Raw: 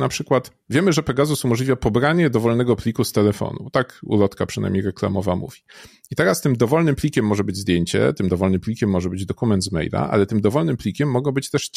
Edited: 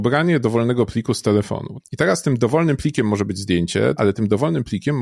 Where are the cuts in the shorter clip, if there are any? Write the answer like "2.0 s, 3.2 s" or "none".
1.8 s, 4.0 s